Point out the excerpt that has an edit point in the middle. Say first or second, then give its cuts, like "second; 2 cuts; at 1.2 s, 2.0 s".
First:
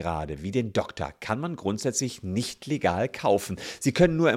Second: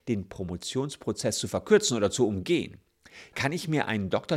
second; 1 cut; at 3.3 s